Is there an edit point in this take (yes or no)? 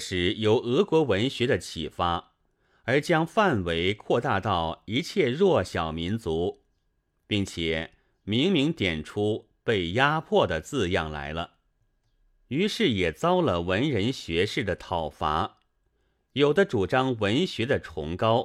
no